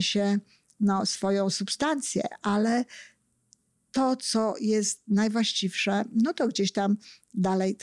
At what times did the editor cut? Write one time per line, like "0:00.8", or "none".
none

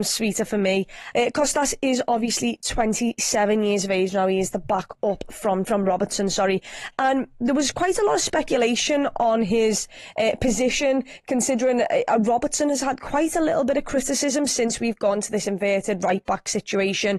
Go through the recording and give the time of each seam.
0:01.1
0:05.6

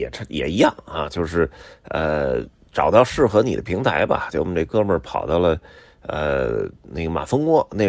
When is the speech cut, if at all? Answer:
none

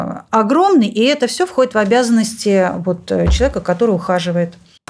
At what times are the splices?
none

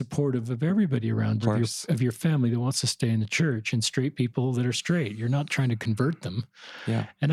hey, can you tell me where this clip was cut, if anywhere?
0:01.4

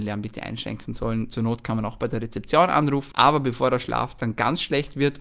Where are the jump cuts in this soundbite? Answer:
0:03.1

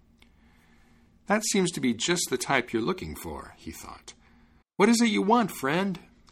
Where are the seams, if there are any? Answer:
0:04.6

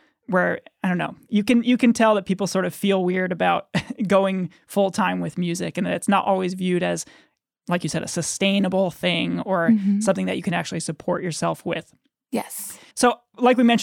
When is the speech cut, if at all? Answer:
0:12.9

